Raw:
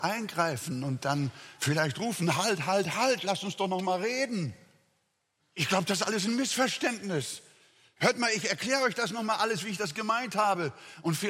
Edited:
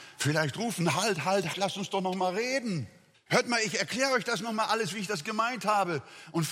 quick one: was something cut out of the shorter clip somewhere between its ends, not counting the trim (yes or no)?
yes